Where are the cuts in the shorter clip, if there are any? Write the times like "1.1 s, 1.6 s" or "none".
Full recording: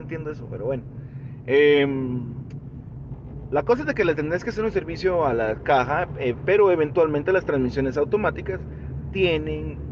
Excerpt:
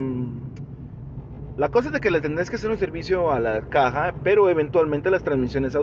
4.2 s

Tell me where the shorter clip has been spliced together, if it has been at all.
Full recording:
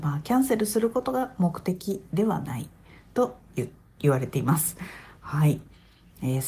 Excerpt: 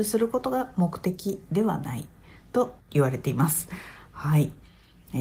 2.8 s

